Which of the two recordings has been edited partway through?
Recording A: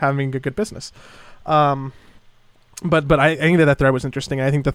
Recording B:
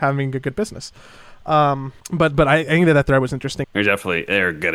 B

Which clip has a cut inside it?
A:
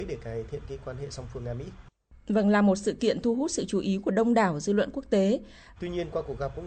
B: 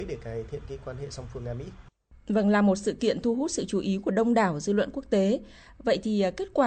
A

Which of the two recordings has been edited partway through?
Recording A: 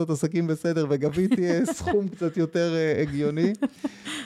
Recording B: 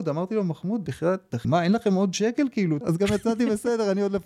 B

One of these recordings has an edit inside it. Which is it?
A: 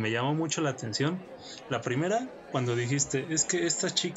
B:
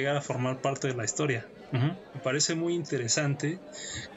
B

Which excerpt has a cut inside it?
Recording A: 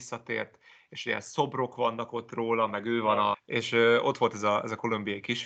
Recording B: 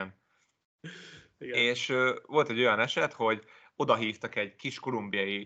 A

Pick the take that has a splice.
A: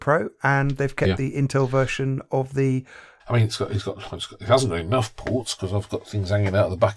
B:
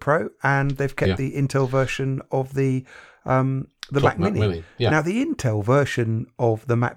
A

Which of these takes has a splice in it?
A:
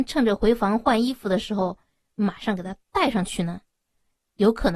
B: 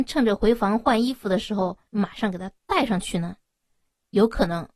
B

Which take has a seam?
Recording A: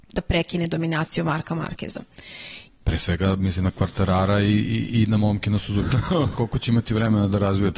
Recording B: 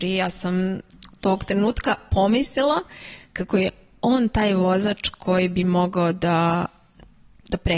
A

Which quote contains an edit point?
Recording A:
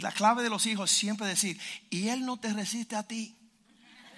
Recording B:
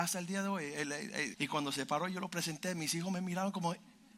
B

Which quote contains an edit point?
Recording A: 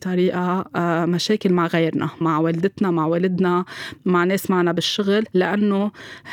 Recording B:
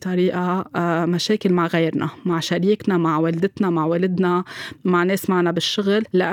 A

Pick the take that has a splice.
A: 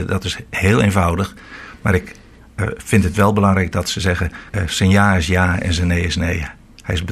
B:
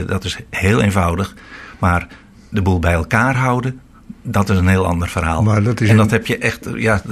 A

